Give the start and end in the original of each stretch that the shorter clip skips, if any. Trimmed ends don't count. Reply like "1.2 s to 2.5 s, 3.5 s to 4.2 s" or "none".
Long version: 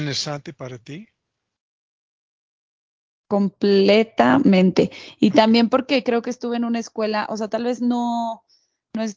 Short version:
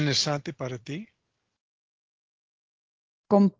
none